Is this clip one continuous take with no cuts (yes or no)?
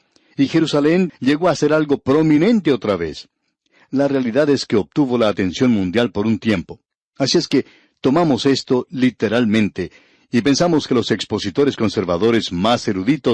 no